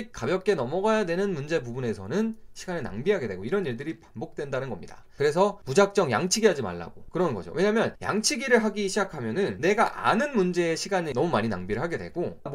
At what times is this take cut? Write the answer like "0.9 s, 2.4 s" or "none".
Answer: 5.2 s